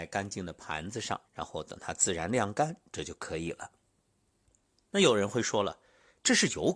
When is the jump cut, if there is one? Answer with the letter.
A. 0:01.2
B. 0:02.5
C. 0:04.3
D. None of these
A